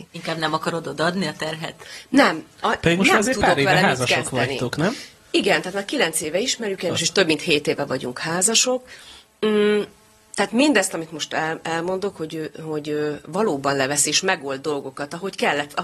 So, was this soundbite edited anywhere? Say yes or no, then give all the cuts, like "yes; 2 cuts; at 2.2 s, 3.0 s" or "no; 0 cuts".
no; 0 cuts